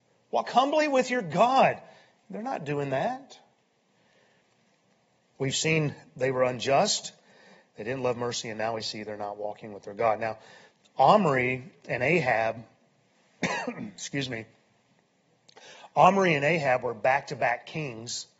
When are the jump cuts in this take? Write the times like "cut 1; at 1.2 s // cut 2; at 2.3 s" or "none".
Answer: none